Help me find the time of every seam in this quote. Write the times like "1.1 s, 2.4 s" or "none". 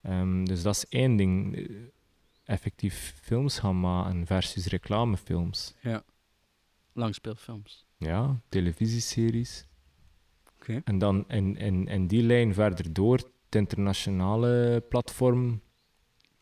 none